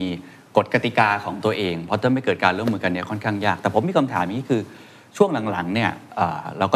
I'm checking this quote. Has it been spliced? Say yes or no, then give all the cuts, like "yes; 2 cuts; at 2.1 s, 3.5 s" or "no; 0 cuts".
no; 0 cuts